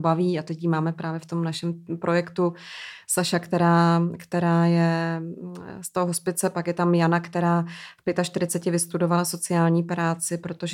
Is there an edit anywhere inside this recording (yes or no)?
no